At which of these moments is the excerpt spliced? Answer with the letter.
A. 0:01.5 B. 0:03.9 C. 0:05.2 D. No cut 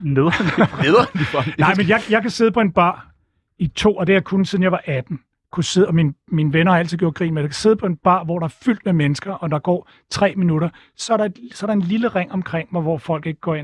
D